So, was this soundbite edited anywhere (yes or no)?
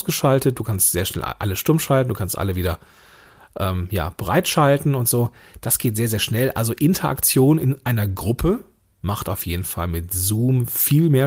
no